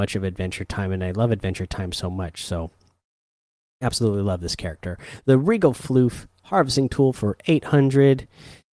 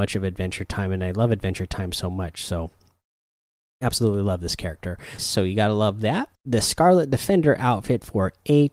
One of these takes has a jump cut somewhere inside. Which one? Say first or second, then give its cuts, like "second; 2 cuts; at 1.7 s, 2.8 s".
second; 2 cuts; at 5.2 s, 6.3 s